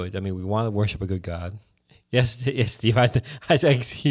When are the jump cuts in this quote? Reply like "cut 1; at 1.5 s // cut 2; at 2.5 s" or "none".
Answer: none